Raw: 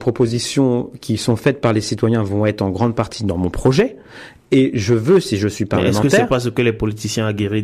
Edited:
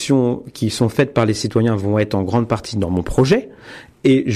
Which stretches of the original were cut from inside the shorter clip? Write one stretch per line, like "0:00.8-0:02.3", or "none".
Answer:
none